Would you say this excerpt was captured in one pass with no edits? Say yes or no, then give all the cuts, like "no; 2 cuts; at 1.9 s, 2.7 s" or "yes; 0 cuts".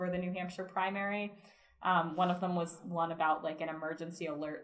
yes; 0 cuts